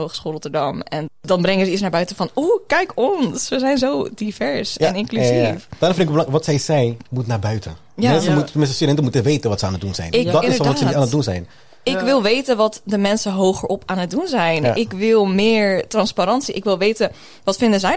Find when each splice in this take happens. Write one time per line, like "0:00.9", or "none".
0:01.1